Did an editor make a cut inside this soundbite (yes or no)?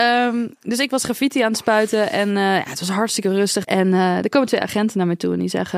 yes